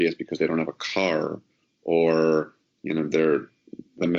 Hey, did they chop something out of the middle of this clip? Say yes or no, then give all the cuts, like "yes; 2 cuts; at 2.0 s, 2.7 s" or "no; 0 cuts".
no; 0 cuts